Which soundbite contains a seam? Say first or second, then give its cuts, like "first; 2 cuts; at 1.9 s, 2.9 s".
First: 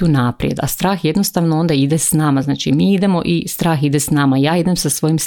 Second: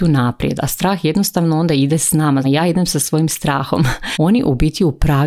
second; 2 cuts; at 2.4 s, 4.1 s